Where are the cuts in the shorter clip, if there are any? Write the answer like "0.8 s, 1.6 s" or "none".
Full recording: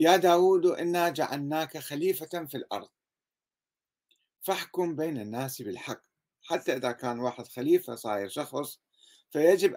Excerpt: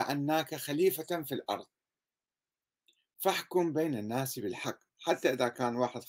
4.9 s